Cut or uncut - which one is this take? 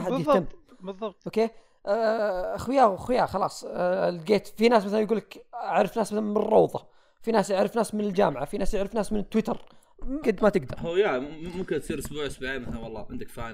cut